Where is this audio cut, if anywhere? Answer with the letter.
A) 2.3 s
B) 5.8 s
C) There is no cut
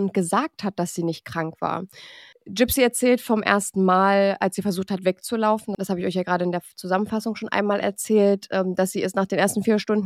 A